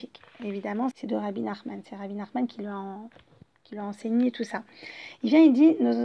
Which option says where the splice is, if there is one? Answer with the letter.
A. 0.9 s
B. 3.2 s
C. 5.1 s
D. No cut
A